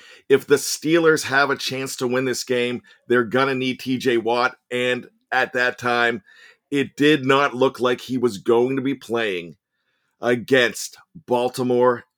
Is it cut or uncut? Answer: uncut